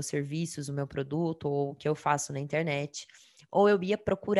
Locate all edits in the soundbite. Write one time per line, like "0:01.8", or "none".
none